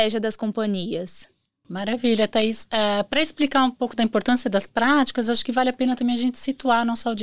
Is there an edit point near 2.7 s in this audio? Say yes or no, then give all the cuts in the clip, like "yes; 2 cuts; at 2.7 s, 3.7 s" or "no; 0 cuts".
no; 0 cuts